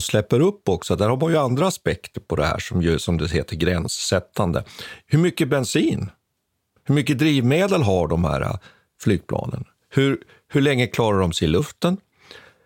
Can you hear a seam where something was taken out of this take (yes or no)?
no